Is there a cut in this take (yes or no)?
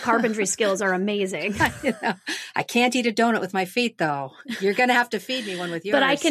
no